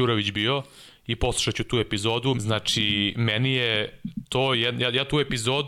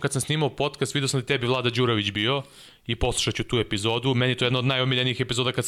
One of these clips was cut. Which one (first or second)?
first